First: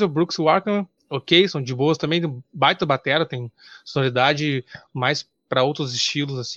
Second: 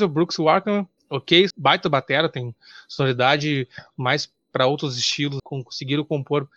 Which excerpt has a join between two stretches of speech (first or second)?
second